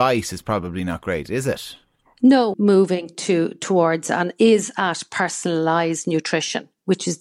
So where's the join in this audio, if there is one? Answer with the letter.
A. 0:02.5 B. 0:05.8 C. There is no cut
A